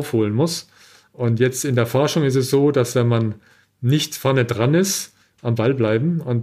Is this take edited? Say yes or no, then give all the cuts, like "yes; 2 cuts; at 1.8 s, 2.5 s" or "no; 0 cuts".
yes; 1 cut; at 5.2 s